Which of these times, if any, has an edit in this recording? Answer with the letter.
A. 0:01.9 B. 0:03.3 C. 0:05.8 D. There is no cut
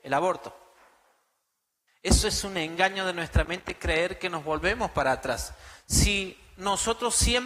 A